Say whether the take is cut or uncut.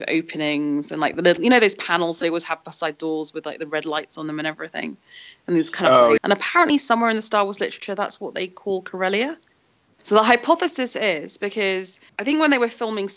cut